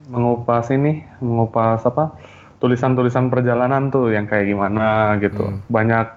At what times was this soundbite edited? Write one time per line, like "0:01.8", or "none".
none